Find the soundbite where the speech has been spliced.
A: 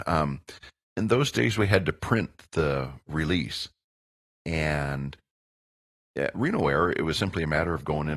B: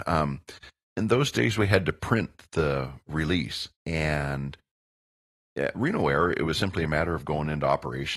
B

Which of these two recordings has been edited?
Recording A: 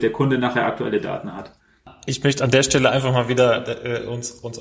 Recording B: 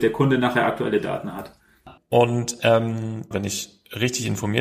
B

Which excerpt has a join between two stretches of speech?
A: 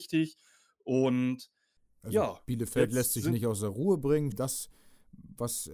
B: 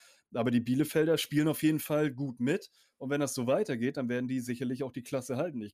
A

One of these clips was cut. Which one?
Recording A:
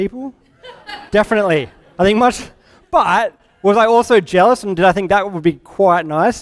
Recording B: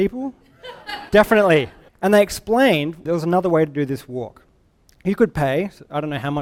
B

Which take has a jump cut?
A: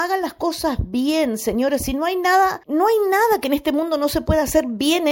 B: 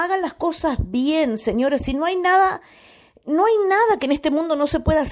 A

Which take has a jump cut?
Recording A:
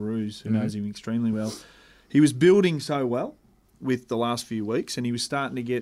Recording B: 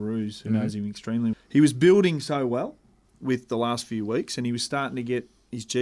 B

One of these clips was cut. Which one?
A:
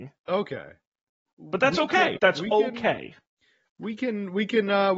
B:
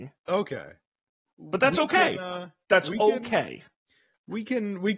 A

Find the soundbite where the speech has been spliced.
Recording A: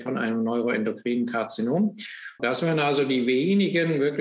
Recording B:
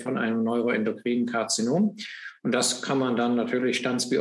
A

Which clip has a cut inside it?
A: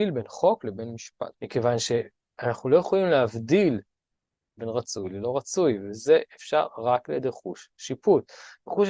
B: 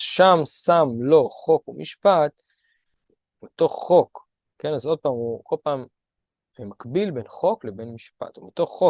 A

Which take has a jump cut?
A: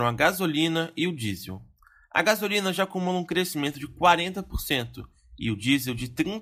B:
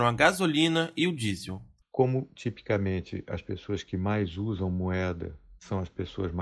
B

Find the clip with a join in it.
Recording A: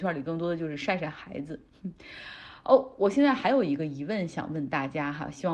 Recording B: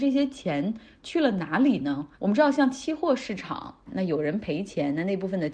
B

